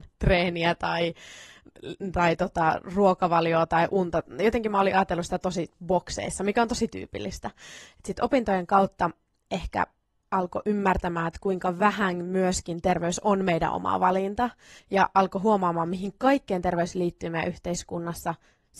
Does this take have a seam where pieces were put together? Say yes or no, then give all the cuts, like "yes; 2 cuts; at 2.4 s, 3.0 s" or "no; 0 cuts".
yes; 1 cut; at 14.8 s